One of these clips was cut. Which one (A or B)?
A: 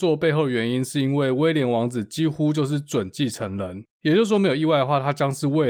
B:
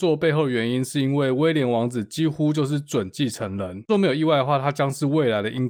B